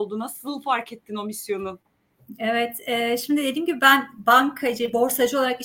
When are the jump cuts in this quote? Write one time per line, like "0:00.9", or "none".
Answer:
none